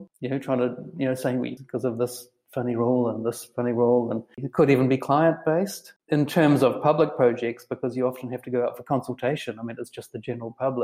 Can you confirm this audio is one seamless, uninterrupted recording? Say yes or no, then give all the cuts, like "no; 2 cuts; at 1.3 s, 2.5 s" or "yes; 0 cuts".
no; 1 cut; at 1.6 s